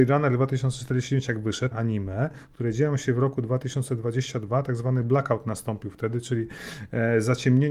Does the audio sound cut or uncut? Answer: cut